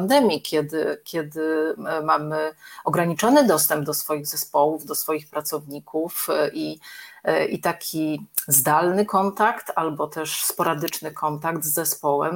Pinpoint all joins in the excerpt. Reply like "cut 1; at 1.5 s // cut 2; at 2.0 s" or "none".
none